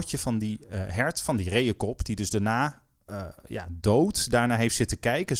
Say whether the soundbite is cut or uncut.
uncut